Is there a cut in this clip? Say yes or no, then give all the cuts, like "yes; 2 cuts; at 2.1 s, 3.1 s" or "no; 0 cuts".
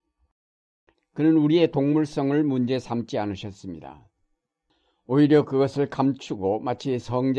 yes; 1 cut; at 0.9 s